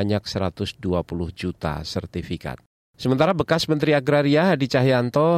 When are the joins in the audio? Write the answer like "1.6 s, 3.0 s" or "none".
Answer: none